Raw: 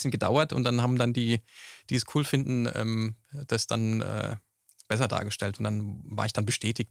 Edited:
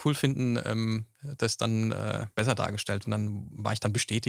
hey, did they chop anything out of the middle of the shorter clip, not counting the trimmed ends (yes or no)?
yes